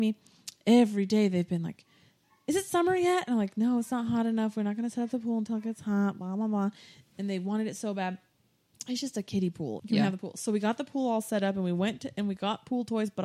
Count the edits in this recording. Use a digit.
1